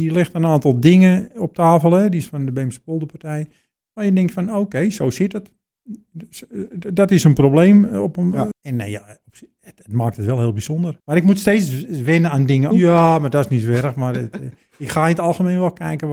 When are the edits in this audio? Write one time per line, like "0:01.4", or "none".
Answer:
0:08.5
0:11.0
0:12.7